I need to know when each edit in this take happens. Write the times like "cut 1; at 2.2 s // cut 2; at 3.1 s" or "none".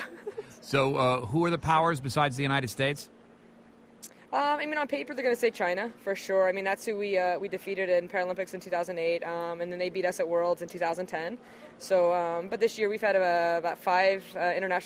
none